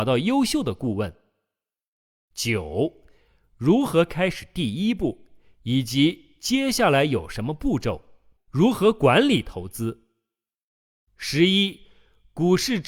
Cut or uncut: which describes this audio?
cut